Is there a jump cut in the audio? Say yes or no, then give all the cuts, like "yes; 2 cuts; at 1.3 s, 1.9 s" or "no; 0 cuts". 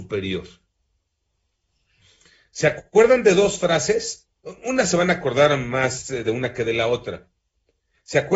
no; 0 cuts